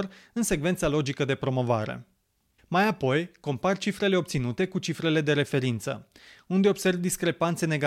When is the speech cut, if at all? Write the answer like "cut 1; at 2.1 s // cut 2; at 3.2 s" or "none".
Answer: cut 1; at 2.6 s